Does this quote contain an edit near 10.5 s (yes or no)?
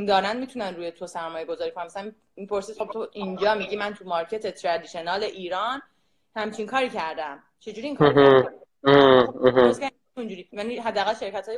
yes